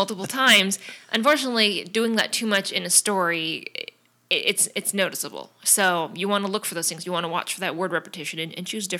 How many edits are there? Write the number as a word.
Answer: zero